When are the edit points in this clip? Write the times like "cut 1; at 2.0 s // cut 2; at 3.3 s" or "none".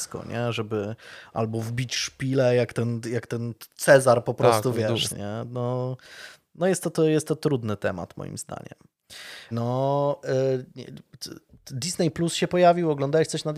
cut 1; at 5.1 s // cut 2; at 9.5 s